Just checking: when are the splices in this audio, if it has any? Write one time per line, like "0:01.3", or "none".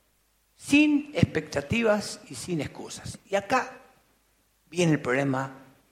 none